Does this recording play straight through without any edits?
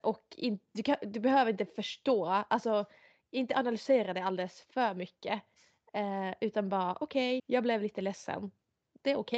no; 1 cut; at 7.4 s

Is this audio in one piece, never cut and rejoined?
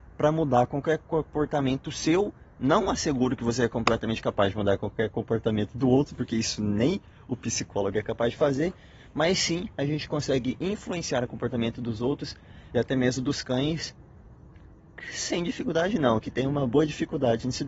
yes; 0 cuts

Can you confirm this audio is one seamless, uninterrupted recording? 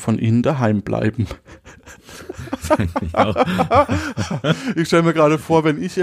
yes; 0 cuts

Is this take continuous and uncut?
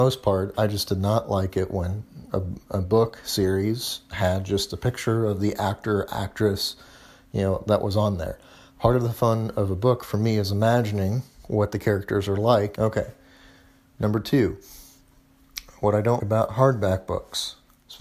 no; 2 cuts; at 12.8 s, 16.2 s

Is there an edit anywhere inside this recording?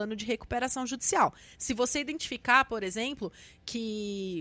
yes; 1 cut; at 1.5 s

